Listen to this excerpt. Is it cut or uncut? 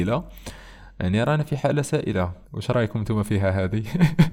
cut